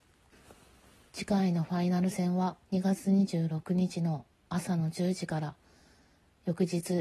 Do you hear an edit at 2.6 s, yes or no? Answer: yes